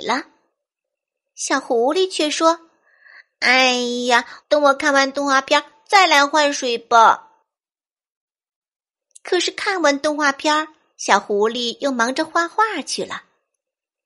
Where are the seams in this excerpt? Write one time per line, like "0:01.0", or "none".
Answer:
0:04.4